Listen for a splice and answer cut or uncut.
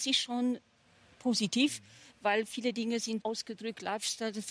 cut